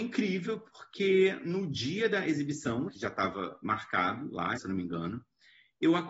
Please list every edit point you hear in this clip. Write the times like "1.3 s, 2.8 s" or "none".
2.9 s, 4.6 s